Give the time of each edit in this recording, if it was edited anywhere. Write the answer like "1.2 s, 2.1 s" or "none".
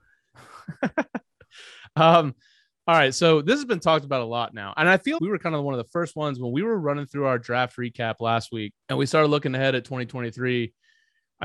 5.2 s, 8.8 s